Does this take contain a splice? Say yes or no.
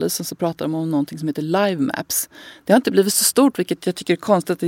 no